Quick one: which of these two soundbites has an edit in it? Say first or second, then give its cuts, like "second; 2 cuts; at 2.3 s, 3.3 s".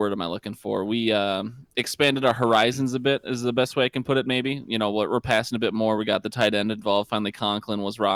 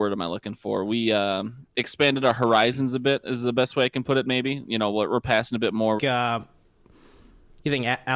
second; 1 cut; at 6.0 s